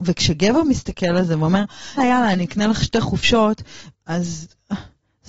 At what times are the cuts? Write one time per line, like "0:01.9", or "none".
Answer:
0:02.0
0:03.9

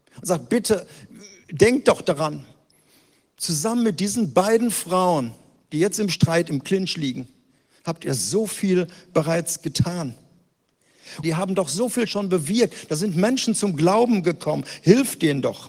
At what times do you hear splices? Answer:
0:11.2

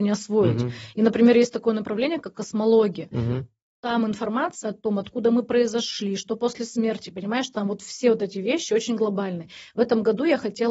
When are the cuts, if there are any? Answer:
none

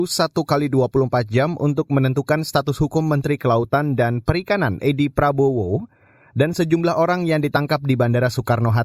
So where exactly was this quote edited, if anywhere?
none

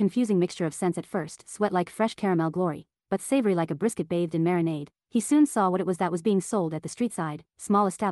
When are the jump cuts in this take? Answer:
none

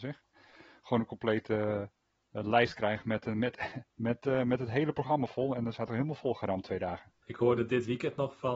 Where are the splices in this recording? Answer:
0:03.9
0:07.2

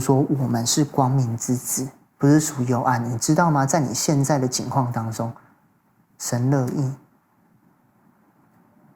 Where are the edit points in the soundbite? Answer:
0:02.2

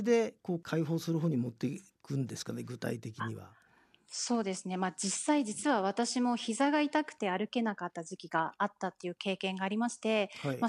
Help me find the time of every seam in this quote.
none

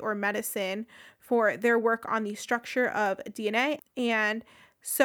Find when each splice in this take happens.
0:03.8

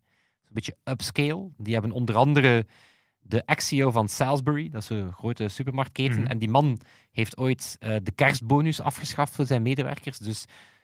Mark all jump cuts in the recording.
none

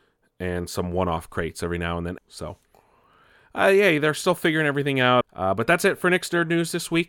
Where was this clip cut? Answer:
0:02.2
0:05.2

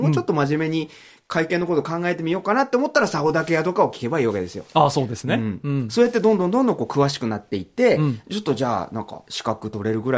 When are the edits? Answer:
none

